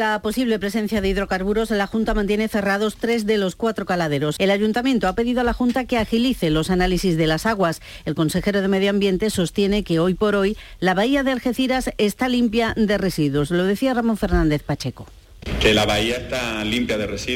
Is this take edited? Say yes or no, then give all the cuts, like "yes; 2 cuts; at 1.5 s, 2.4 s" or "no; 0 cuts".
yes; 1 cut; at 4.4 s